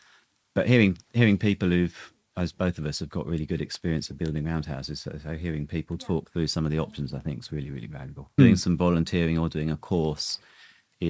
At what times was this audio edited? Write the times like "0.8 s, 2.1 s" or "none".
8.4 s